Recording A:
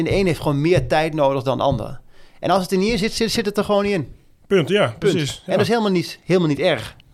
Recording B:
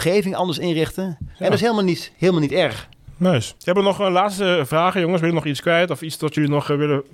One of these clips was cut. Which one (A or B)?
B